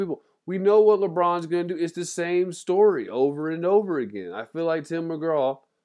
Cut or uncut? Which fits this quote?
uncut